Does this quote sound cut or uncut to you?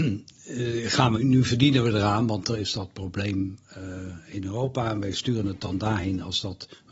cut